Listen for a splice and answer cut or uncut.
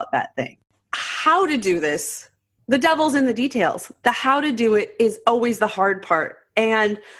uncut